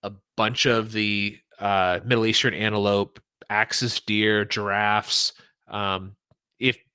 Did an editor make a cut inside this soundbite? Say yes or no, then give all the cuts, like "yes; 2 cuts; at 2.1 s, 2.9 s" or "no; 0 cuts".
no; 0 cuts